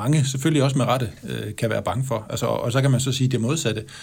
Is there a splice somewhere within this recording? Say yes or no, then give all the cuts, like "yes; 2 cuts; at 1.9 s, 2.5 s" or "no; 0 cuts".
no; 0 cuts